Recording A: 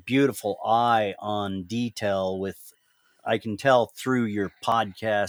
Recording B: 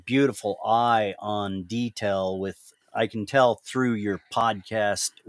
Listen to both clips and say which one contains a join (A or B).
B